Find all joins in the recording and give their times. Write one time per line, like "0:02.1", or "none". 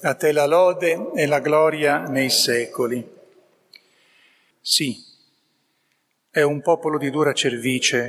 0:04.5